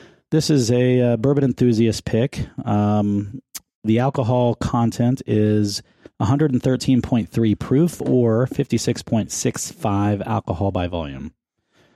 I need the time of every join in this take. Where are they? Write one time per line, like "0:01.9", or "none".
none